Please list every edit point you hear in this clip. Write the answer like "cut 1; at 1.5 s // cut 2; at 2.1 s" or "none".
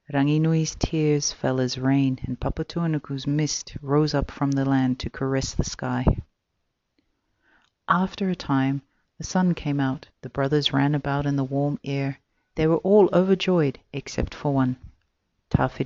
cut 1; at 10.1 s